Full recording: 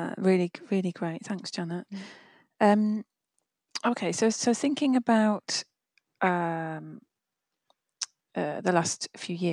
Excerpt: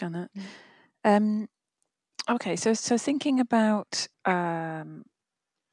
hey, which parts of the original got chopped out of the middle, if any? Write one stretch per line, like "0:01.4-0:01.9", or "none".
0:05.7-0:06.1